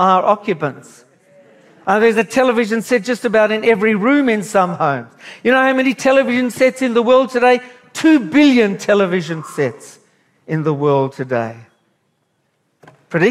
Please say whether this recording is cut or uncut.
uncut